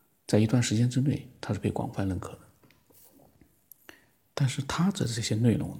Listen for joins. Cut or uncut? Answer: uncut